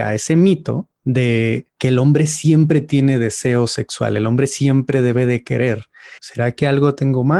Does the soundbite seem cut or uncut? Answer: cut